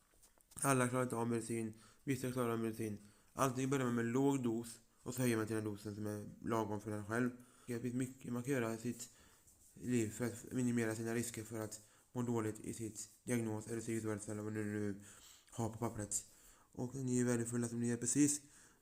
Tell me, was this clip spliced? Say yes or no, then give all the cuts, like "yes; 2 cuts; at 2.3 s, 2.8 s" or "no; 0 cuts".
yes; 2 cuts; at 7.7 s, 16.6 s